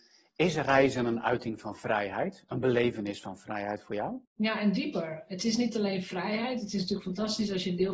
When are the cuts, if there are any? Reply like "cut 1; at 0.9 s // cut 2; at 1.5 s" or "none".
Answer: cut 1; at 4.2 s